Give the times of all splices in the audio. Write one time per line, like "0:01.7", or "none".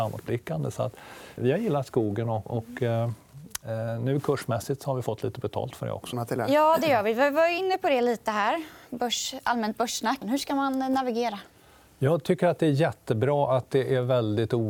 0:01.4
0:06.1
0:10.2